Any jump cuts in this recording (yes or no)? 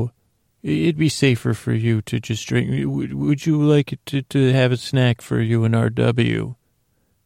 no